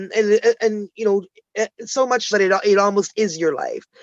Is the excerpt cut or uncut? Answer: cut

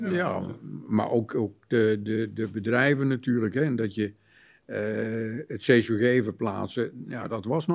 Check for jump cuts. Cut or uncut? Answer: uncut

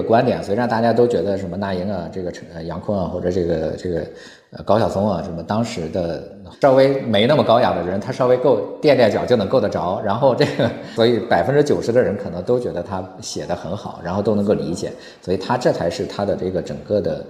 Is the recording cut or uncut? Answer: cut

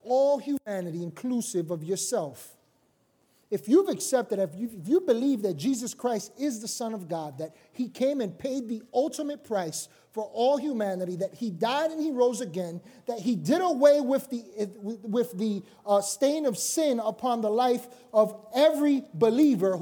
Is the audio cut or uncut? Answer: uncut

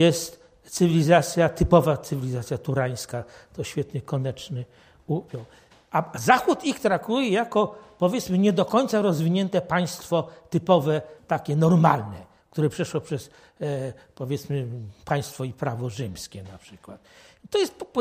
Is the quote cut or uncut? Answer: uncut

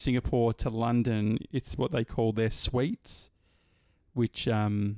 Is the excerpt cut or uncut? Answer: uncut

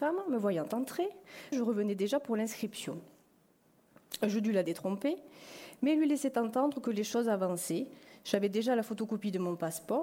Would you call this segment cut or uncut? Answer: cut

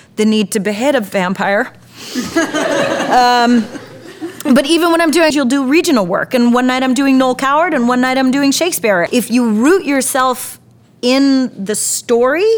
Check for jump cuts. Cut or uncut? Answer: cut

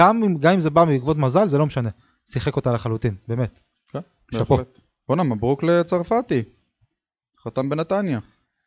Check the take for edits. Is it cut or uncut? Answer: uncut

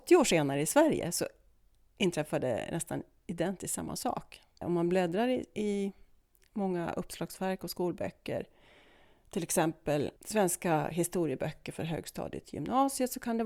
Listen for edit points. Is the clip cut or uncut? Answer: cut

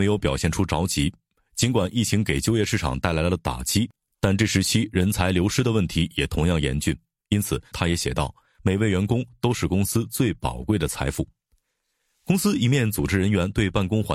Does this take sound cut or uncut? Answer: cut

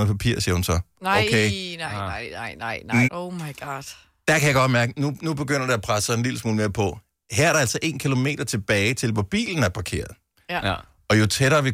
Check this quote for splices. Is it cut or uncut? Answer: cut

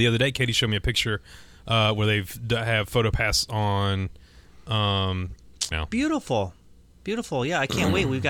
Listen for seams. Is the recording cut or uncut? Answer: cut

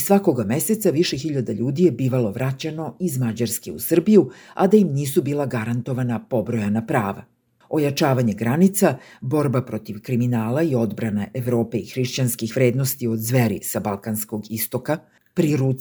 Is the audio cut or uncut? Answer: cut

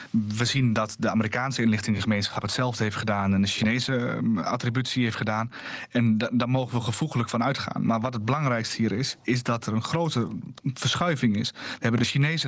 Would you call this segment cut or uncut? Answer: uncut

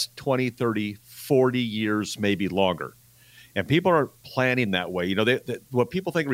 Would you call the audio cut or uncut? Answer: uncut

